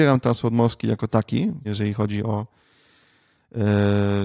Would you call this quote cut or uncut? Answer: cut